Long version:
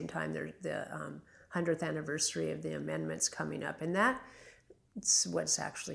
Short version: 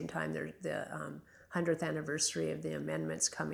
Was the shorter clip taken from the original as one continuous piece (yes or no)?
yes